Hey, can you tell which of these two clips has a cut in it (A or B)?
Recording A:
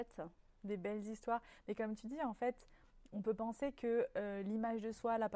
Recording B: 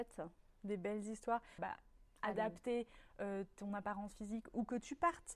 B